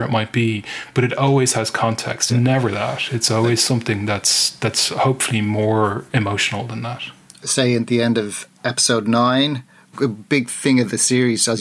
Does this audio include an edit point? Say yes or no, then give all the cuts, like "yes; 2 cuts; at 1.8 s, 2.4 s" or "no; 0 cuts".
yes; 1 cut; at 2.3 s